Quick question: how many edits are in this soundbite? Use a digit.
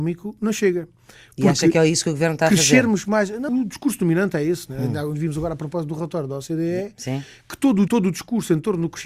2